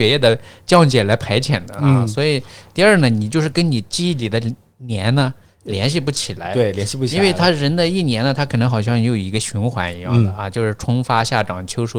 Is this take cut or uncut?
uncut